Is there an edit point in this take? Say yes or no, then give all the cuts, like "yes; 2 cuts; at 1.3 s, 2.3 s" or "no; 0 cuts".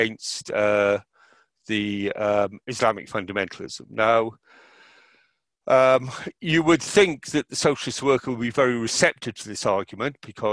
no; 0 cuts